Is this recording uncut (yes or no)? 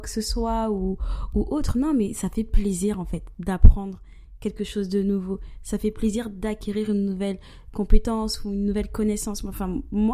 yes